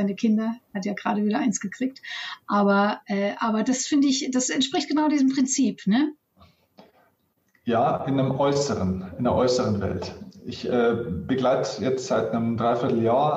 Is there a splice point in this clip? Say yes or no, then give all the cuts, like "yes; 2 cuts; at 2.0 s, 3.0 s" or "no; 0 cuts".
no; 0 cuts